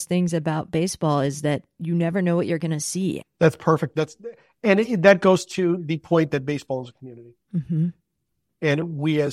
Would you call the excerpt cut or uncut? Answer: cut